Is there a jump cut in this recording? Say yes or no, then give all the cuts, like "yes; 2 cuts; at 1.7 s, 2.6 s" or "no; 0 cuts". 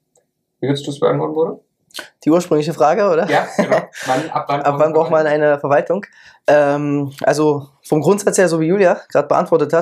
no; 0 cuts